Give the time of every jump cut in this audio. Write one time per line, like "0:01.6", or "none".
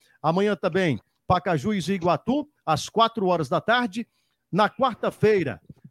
none